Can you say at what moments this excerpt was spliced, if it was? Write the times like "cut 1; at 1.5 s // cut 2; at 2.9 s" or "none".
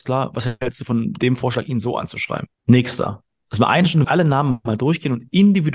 cut 1; at 2.5 s // cut 2; at 4.0 s

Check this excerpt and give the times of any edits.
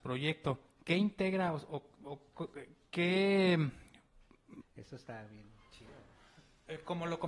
cut 1; at 4.6 s

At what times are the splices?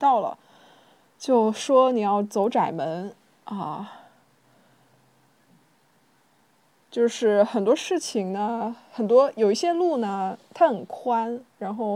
none

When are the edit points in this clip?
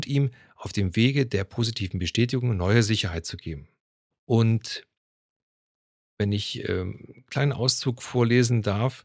cut 1; at 4.1 s

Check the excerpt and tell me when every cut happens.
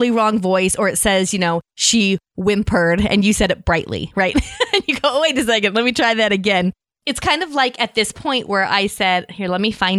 none

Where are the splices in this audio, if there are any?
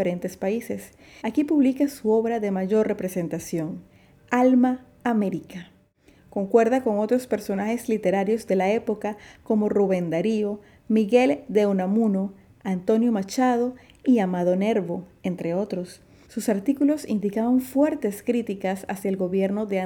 cut 1; at 1.2 s // cut 2; at 16.3 s

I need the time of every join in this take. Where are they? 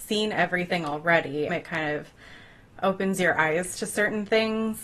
cut 1; at 1.5 s

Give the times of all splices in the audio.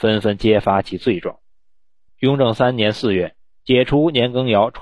cut 1; at 2.1 s

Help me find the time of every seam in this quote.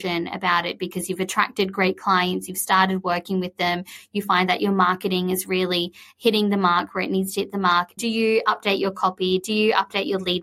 cut 1; at 8.0 s

